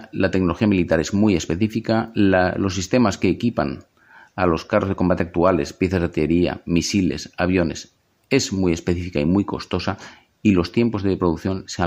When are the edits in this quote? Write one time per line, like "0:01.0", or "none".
none